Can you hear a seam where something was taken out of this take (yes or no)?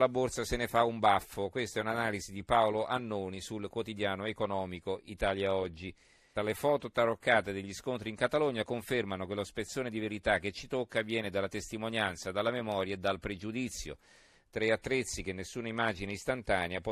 yes